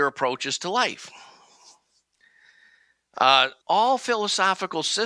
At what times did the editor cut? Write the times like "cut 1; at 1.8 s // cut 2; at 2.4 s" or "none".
cut 1; at 3.6 s